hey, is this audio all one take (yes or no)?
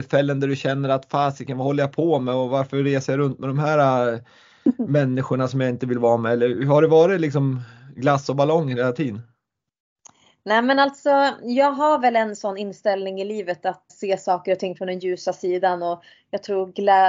no